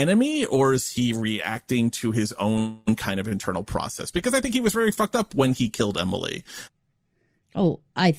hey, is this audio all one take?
yes; 0 cuts

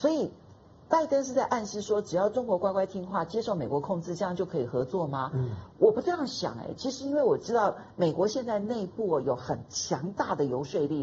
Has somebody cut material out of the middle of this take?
no; 0 cuts

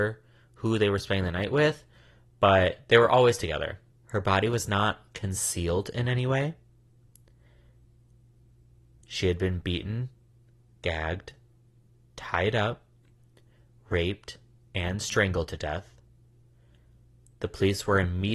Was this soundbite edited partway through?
yes; 2 cuts; at 3.9 s, 9.0 s

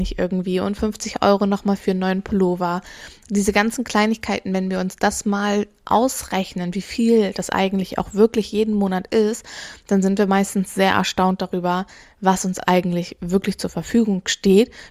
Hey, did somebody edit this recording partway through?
no; 0 cuts

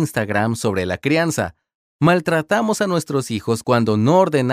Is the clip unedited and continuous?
yes; 0 cuts

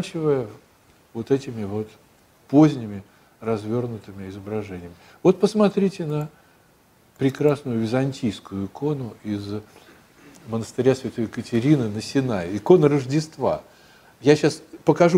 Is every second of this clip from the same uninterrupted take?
yes; 0 cuts

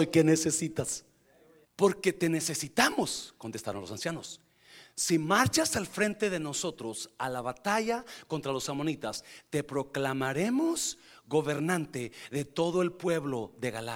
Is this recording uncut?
no; 1 cut; at 1.6 s

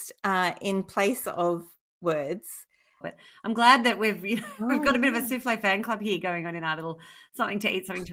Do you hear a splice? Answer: yes; 1 cut; at 3.0 s

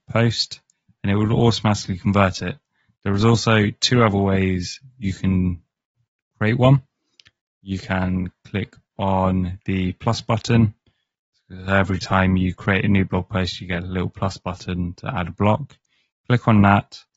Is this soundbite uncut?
yes; 0 cuts

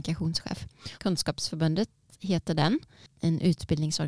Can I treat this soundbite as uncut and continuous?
no; 1 cut; at 0.9 s

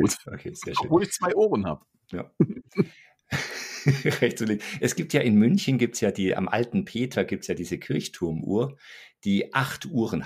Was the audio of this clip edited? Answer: no; 0 cuts

